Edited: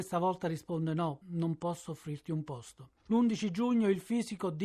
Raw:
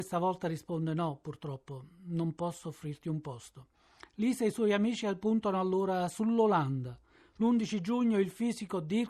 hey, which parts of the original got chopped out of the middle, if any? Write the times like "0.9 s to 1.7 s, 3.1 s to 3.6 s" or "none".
1.2 s to 2.0 s, 3.8 s to 7.3 s